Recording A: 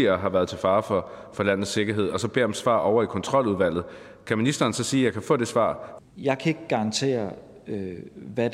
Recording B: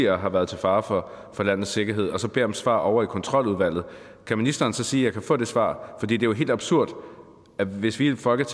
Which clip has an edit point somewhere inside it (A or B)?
A